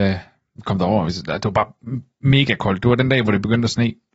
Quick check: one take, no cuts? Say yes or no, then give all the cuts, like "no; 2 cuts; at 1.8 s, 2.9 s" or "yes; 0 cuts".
yes; 0 cuts